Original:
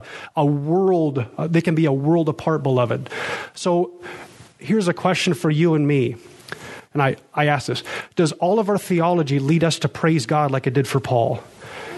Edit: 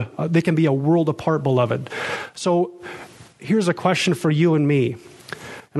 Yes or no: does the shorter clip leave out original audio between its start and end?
no